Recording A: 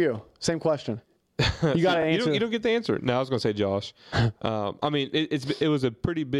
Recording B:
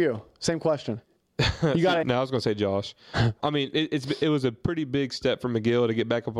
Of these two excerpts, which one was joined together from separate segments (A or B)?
B